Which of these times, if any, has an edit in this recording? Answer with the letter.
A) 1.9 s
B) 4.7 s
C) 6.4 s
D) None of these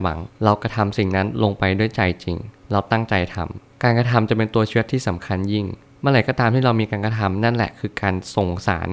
D